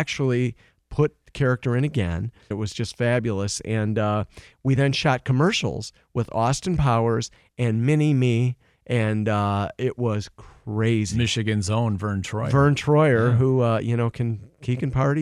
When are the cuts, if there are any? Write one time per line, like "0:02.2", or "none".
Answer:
0:02.5